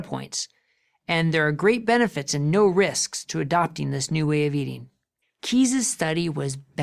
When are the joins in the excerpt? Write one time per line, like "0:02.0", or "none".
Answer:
0:05.2